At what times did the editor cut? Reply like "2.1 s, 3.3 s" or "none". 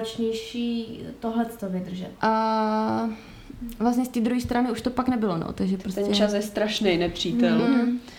2.2 s